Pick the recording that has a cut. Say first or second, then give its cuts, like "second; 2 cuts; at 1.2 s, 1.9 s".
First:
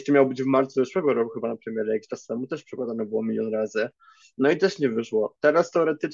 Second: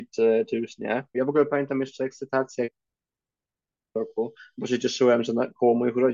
second; 1 cut; at 1.1 s